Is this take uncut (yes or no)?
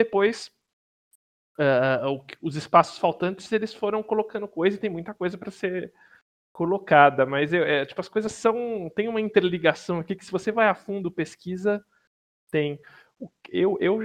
yes